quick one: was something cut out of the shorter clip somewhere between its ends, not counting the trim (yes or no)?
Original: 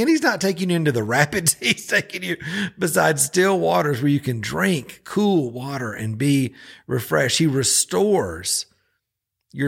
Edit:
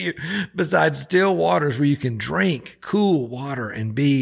no